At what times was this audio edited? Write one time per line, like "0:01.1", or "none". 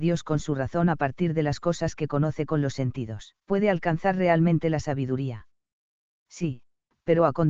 0:03.4